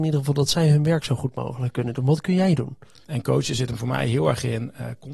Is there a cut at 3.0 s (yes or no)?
yes